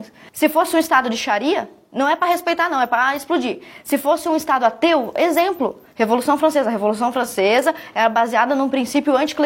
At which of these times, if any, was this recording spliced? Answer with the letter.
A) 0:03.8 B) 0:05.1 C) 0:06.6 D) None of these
D